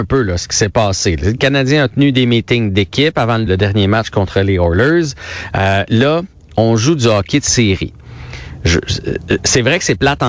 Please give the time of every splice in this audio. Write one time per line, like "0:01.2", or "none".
0:03.5
0:05.9

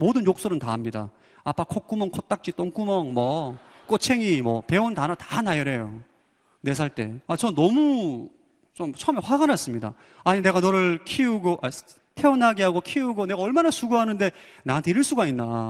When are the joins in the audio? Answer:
0:07.2

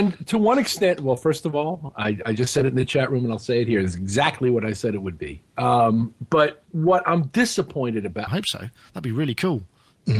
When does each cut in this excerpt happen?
0:06.7
0:08.3

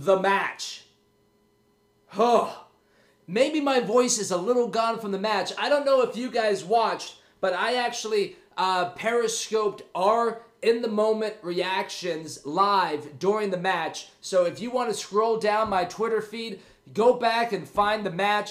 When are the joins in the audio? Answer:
none

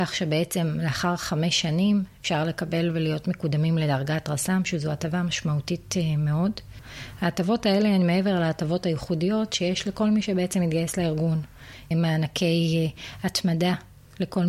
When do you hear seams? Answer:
0:11.9

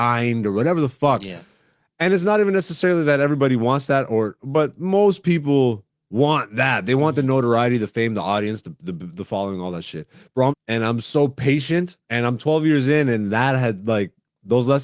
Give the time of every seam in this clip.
0:10.5
0:12.0

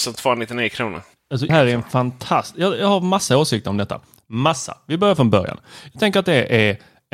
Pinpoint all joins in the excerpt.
0:01.5

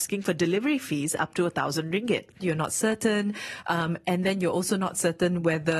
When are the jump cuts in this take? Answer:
0:02.4

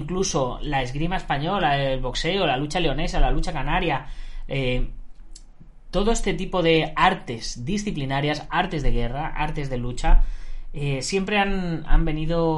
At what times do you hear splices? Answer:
none

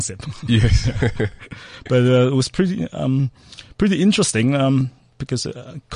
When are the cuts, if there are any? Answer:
none

